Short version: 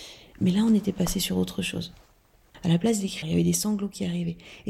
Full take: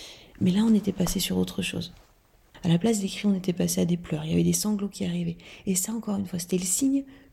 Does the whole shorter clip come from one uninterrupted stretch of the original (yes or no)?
no